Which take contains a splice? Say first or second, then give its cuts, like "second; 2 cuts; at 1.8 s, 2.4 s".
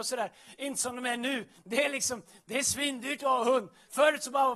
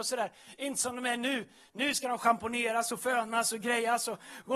first; 1 cut; at 1.6 s